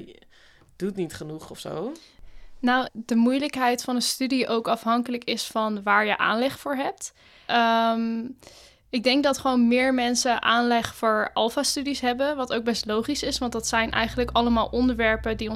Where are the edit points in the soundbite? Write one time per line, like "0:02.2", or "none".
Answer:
0:02.9
0:07.5